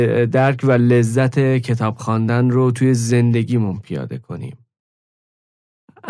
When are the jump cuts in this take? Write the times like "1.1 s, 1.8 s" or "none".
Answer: none